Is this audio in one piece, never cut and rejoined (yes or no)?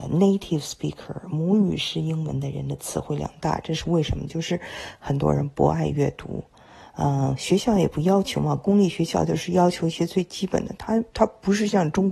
yes